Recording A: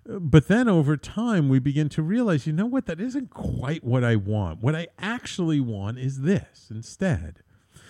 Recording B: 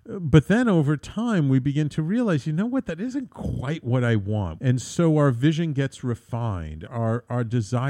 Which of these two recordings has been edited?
B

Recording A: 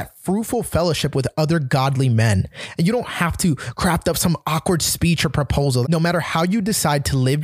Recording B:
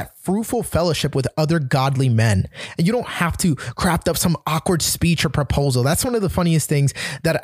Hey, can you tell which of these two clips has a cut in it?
A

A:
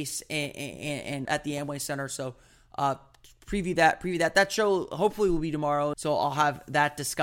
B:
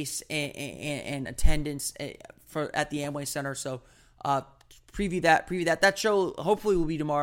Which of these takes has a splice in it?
A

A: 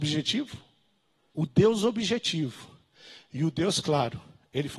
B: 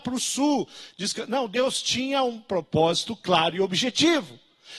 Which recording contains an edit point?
A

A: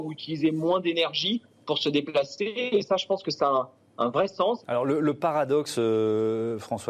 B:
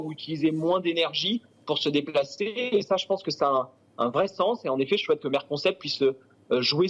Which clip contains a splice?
A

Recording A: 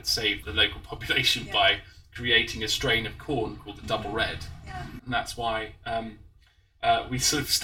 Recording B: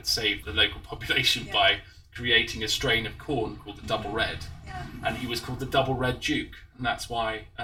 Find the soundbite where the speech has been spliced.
A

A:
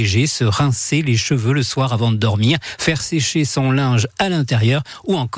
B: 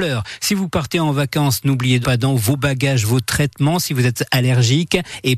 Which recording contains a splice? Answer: B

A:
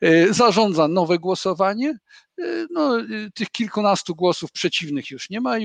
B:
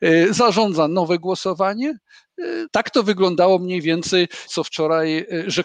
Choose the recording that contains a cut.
B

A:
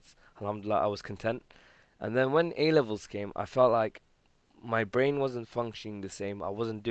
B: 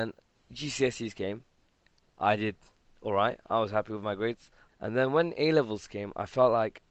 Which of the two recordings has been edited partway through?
B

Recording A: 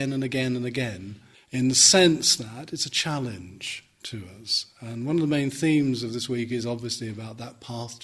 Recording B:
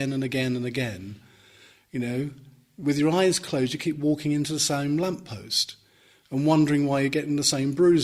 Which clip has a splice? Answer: A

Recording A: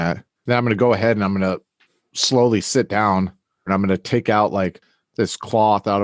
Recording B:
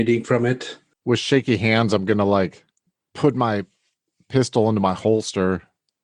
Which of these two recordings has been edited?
A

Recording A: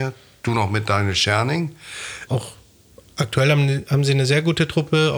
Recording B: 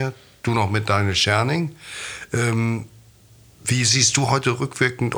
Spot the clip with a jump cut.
A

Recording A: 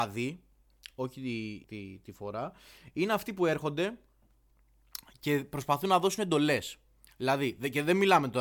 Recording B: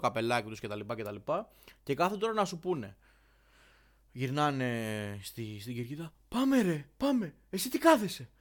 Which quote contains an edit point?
A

